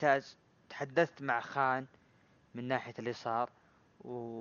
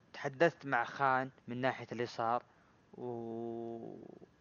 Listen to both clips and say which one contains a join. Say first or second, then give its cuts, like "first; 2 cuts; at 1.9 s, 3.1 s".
second; 1 cut; at 1.4 s